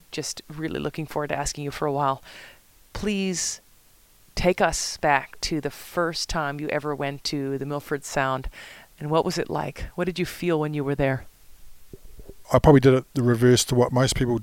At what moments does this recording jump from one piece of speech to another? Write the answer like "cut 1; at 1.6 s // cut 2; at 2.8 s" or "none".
cut 1; at 12.4 s